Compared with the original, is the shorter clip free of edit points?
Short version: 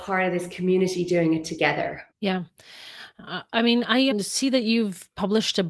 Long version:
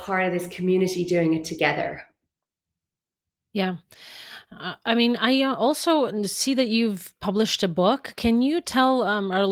no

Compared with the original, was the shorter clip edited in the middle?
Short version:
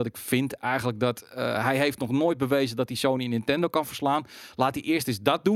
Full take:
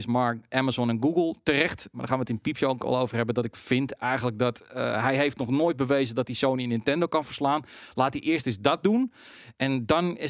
no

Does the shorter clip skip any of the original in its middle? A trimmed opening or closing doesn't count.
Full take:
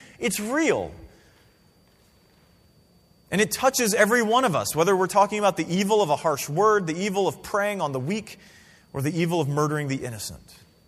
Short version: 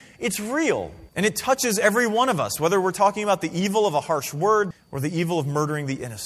yes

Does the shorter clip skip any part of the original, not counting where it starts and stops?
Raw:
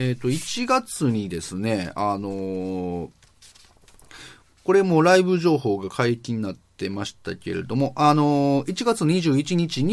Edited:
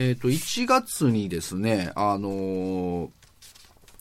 no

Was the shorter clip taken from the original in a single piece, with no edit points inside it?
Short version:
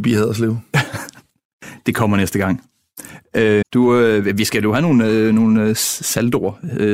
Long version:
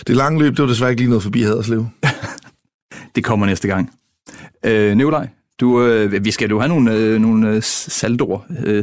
no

